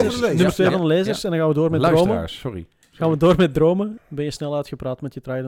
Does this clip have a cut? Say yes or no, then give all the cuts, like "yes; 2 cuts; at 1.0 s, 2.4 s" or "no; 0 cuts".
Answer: yes; 1 cut; at 4.0 s